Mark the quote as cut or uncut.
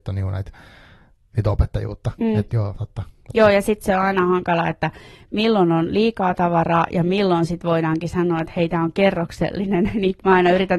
uncut